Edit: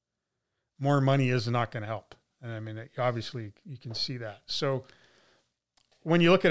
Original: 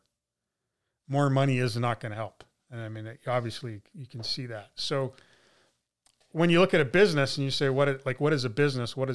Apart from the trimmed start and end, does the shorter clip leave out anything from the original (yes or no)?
no